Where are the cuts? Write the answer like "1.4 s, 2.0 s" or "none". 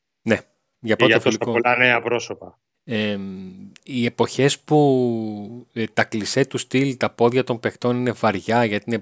2.7 s